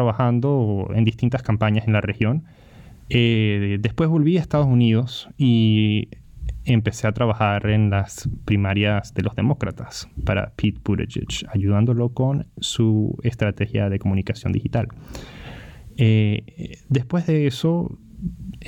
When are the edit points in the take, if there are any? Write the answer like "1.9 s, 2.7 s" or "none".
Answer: 3.1 s